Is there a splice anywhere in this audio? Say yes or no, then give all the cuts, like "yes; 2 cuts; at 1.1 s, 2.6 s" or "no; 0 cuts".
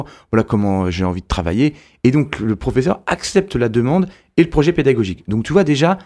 no; 0 cuts